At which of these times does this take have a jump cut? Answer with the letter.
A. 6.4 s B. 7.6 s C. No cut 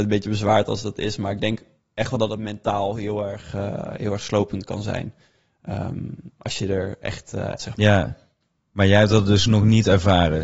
B